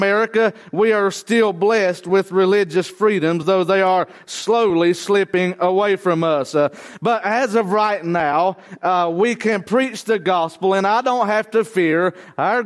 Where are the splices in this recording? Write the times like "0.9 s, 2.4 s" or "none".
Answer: none